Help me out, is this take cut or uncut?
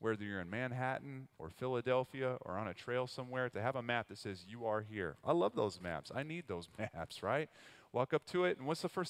uncut